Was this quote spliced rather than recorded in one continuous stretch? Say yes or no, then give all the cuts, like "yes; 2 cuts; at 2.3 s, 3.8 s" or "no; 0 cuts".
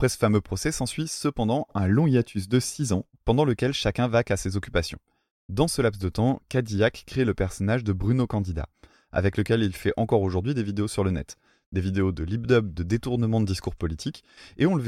no; 0 cuts